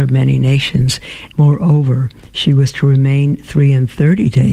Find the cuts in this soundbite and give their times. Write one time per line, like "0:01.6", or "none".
0:01.3